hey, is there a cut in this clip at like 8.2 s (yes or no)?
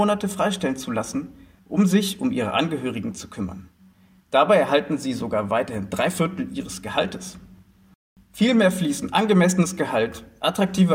yes